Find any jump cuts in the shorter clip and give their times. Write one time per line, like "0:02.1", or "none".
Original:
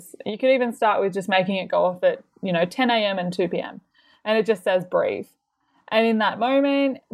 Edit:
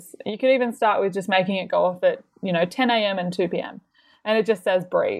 none